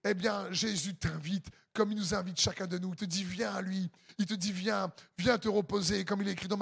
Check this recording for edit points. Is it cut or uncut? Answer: uncut